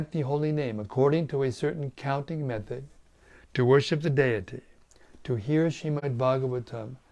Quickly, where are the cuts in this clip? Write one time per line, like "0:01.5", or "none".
none